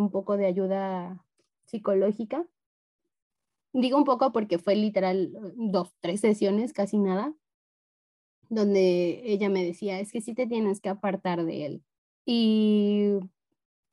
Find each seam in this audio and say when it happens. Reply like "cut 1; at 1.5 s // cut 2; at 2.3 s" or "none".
cut 1; at 12.1 s